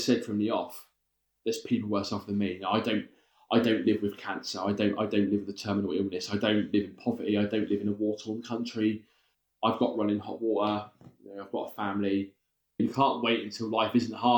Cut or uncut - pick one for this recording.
uncut